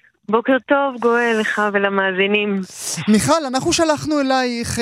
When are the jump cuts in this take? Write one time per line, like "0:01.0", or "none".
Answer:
none